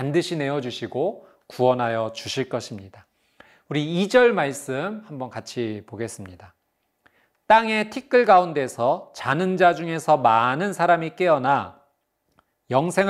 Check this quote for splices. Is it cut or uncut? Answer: uncut